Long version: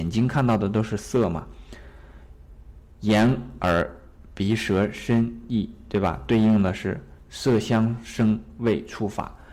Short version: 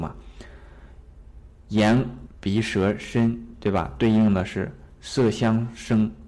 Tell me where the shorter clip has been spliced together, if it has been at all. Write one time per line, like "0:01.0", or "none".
0:02.3
0:03.5